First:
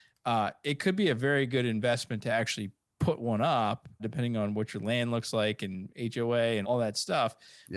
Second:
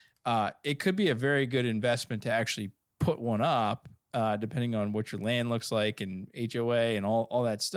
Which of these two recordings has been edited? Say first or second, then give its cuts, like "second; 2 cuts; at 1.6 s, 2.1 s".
first; 2 cuts; at 4.0 s, 6.6 s